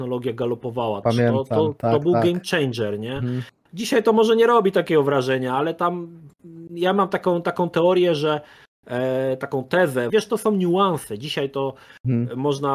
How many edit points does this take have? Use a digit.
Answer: 2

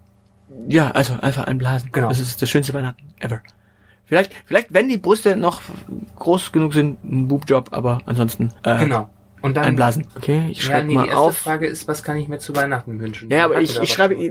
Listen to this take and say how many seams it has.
2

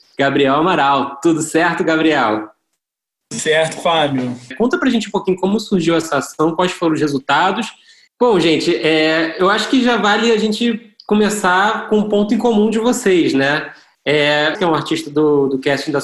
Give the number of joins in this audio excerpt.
3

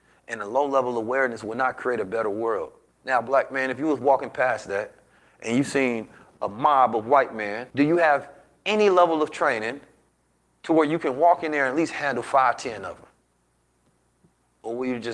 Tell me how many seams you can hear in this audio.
2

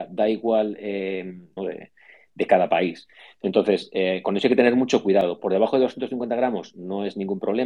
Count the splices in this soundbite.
1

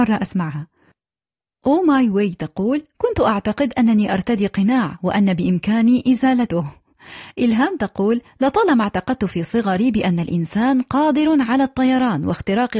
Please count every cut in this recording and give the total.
0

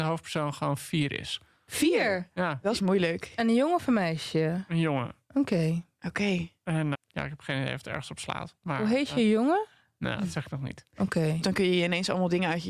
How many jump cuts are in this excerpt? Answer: 2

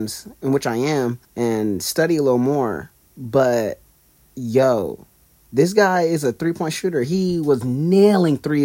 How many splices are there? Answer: 1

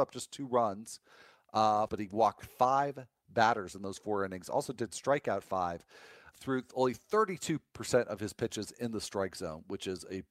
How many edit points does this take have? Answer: 2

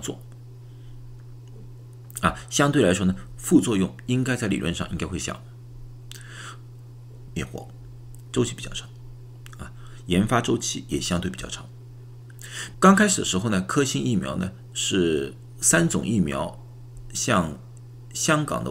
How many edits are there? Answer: 2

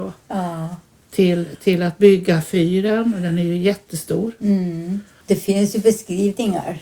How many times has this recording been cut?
1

